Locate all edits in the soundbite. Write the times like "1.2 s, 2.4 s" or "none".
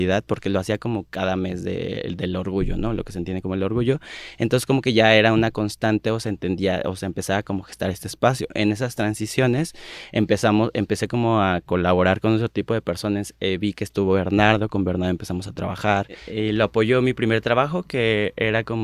none